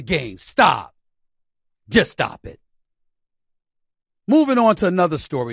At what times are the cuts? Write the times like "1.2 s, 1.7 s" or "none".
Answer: none